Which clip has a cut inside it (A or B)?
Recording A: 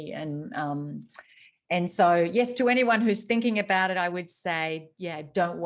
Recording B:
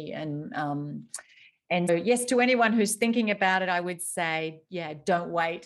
B